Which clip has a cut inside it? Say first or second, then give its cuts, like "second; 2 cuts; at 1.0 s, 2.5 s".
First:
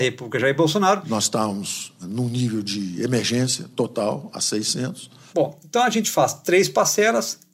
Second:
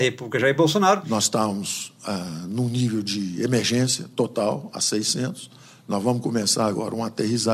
first; 2 cuts; at 2.0 s, 5.3 s